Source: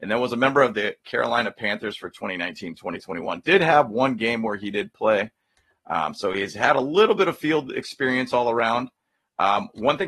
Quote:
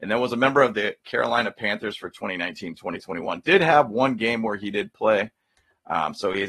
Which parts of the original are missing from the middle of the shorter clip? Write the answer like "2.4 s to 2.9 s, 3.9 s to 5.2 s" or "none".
none